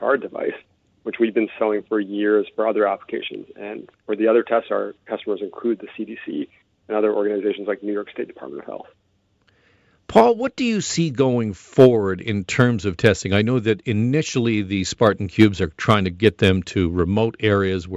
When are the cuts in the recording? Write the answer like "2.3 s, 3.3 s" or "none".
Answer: none